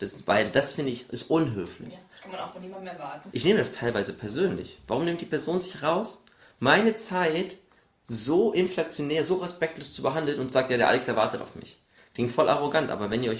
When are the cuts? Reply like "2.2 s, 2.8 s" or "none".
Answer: 3.3 s, 12.0 s